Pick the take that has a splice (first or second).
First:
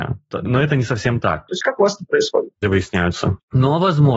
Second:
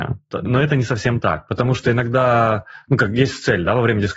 first